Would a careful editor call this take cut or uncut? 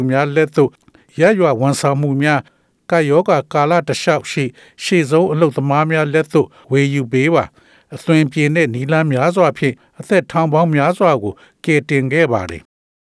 uncut